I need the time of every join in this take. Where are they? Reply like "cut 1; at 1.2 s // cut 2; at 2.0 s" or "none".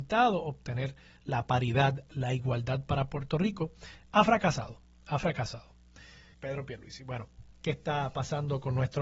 cut 1; at 6.3 s // cut 2; at 7.5 s